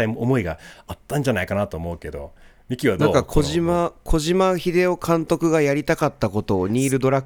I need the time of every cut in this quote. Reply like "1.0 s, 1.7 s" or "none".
none